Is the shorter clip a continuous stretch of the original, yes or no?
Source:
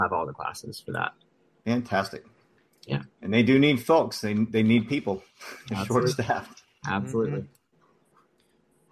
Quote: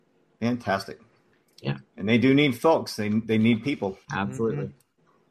no